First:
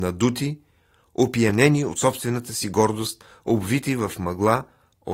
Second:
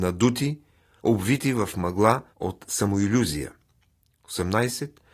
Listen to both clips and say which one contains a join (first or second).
second